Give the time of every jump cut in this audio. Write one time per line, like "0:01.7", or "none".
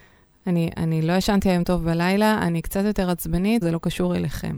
0:03.6